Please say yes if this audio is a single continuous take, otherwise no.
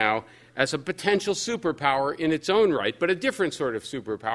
yes